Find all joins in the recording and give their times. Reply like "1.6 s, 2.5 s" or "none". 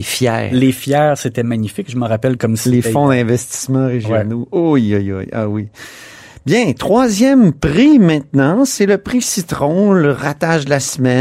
none